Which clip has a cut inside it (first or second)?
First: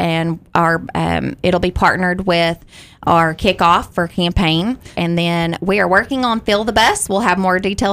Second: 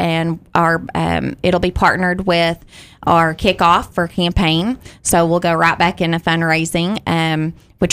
first